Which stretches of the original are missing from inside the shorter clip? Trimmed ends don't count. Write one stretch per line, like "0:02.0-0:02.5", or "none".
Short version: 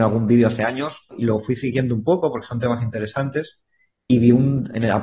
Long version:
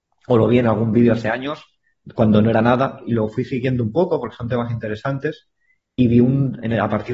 0:01.8-0:03.0